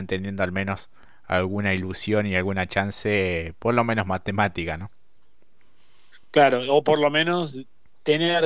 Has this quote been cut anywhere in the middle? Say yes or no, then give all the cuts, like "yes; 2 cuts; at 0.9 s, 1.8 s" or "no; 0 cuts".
no; 0 cuts